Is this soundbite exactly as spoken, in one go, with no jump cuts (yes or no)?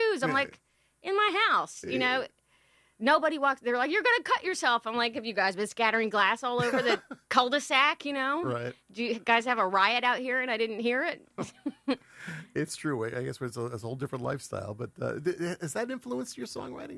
yes